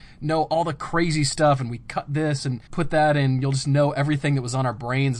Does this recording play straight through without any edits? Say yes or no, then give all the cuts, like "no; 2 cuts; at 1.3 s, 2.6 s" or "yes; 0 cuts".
no; 1 cut; at 2.7 s